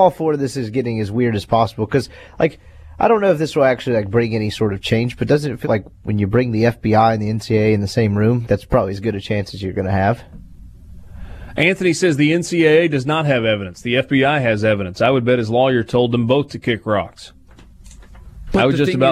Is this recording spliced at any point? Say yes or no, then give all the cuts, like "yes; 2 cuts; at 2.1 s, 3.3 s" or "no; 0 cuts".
yes; 2 cuts; at 5.6 s, 8.4 s